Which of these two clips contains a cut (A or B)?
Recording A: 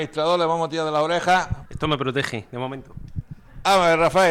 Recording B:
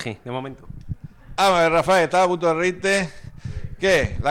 A